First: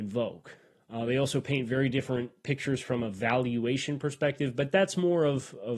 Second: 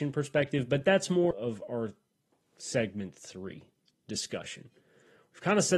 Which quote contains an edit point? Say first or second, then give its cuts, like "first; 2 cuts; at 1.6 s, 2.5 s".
second; 1 cut; at 1.3 s